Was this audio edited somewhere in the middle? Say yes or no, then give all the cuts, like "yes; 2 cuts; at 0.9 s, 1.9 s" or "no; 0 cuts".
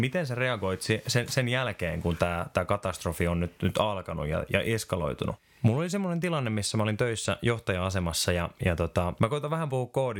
no; 0 cuts